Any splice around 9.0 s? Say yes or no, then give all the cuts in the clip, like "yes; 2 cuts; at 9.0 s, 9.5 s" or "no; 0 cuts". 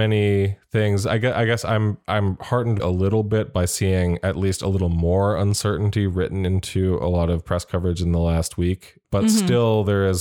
yes; 2 cuts; at 2.8 s, 9.0 s